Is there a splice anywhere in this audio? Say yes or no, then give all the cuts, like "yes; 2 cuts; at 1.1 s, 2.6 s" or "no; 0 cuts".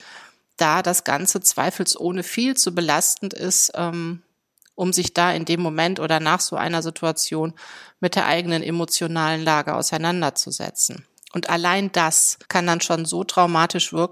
yes; 2 cuts; at 11.2 s, 12.4 s